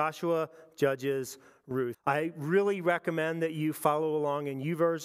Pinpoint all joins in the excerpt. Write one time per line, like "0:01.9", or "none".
0:01.9